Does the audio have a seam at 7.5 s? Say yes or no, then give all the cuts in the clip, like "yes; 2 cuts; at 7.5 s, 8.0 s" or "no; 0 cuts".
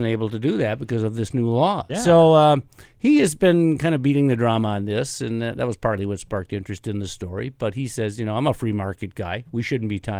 no; 1 cut; at 1.9 s